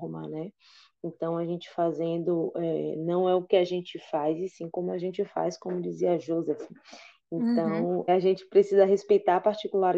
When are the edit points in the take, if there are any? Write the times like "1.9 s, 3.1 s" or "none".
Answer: 8.1 s